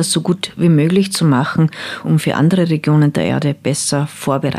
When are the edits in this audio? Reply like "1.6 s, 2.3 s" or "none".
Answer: 2.0 s